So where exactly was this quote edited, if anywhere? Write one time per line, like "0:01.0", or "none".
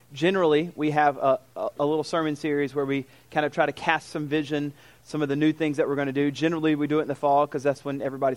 none